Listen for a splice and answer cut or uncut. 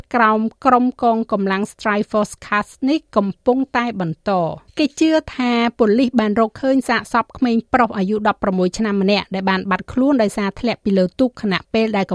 cut